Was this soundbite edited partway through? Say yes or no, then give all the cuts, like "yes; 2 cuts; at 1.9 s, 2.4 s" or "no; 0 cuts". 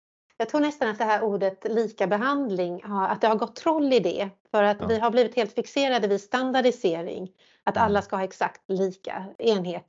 no; 0 cuts